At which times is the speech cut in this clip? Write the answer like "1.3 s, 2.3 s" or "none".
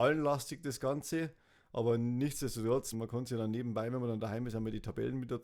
2.9 s